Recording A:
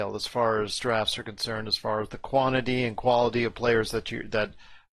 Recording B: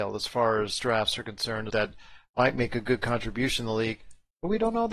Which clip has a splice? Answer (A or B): B